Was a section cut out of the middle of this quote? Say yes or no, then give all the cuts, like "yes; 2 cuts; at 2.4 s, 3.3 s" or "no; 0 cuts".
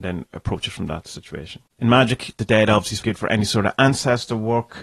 yes; 1 cut; at 3.0 s